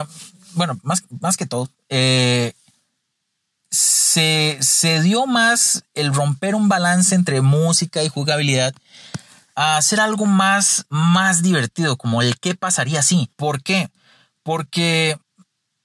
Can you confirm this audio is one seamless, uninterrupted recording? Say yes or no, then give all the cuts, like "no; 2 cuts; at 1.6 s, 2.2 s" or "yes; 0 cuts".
no; 1 cut; at 13.3 s